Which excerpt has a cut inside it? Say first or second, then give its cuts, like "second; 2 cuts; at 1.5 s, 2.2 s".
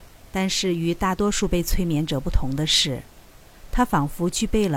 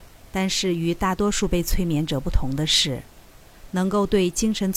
second; 1 cut; at 3.7 s